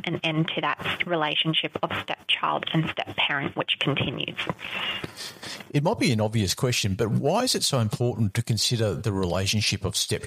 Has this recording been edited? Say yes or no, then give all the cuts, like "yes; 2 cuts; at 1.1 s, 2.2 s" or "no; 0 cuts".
no; 0 cuts